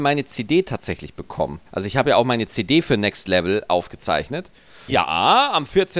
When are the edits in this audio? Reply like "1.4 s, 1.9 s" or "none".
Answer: 1.7 s, 4.9 s